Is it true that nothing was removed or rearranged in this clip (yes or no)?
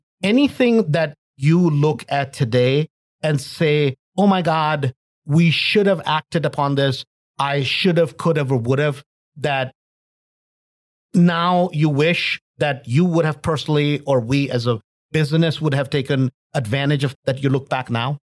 no